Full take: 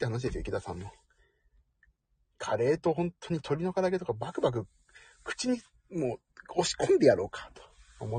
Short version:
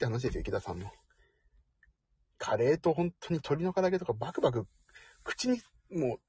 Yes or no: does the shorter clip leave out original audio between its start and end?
no